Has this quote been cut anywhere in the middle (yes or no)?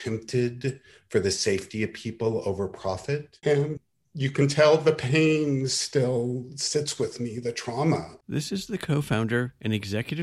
yes